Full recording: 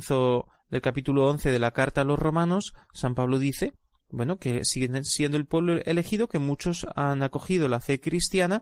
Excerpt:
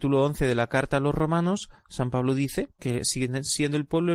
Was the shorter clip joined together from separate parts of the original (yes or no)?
yes